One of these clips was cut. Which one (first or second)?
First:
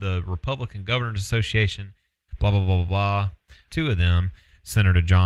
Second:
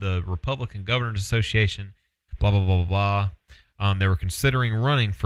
first